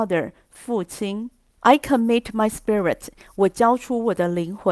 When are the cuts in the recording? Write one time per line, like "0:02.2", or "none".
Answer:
0:01.6